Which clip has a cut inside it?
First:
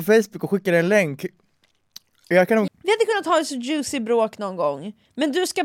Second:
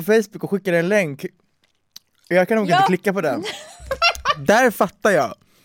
first; 1 cut; at 2.7 s

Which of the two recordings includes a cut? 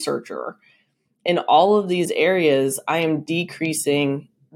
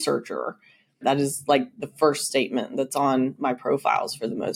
second; 1 cut; at 1.0 s

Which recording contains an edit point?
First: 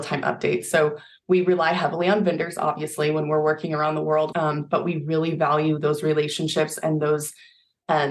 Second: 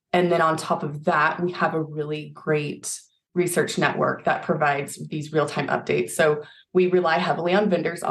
first; 1 cut; at 4.3 s

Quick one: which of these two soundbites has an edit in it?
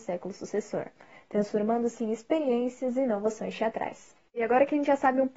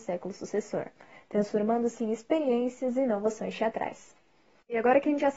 first; 1 cut; at 4.3 s

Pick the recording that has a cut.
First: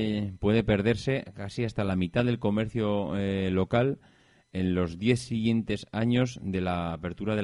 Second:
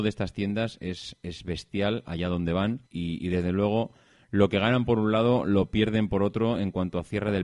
second; 1 cut; at 2.9 s

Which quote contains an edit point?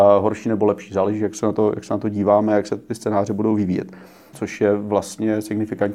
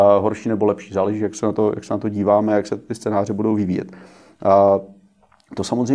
first; 1 cut; at 4.3 s

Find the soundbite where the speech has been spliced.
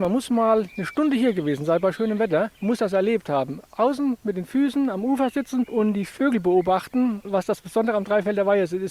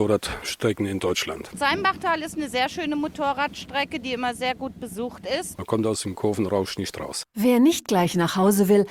first; 1 cut; at 7.2 s

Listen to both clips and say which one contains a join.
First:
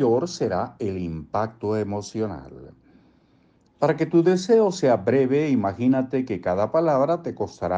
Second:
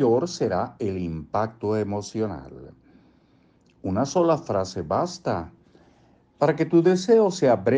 first; 1 cut; at 3.7 s

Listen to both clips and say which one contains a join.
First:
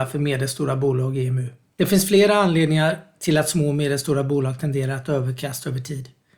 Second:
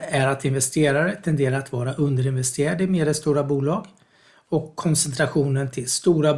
first; 1 cut; at 1.7 s

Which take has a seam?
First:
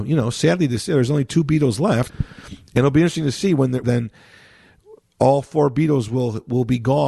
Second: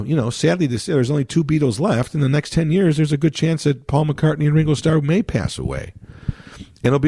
first; 2 cuts; at 2.1 s, 3.8 s

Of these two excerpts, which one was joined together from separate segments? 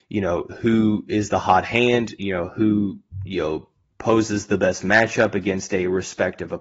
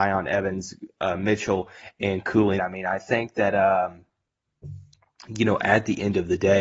second; 1 cut; at 2.6 s

